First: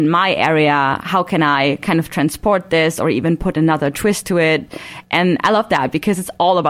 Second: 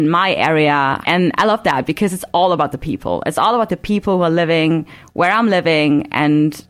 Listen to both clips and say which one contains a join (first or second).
second